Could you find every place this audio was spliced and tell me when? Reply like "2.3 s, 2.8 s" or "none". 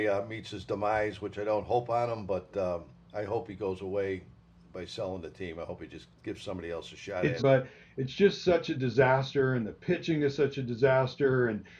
6.2 s, 7.4 s

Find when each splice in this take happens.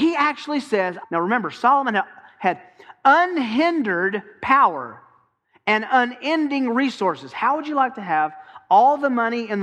1.0 s

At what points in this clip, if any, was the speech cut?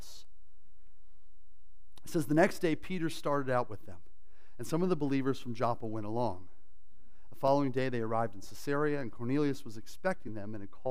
none

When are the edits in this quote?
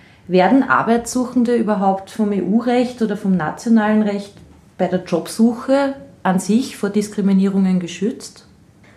none

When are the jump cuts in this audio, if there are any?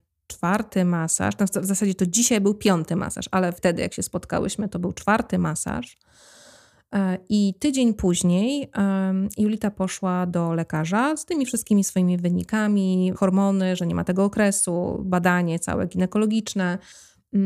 3.5 s, 13.1 s

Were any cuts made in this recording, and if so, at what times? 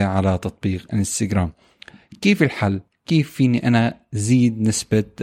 none

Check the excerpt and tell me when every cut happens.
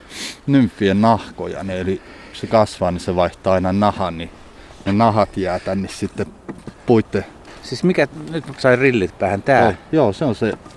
none

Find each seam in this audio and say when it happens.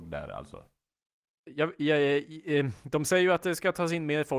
none

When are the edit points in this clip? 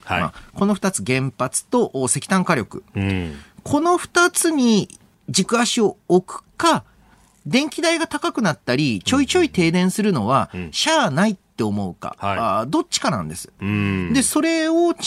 none

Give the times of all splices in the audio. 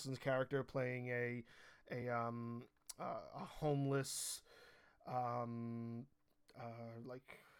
none

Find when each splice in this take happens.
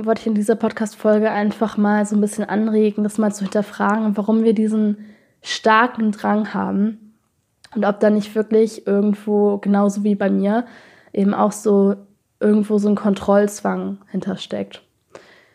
none

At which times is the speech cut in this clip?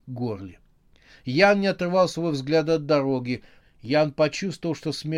3.6 s

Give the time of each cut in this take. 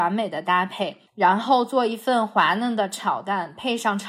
1.1 s

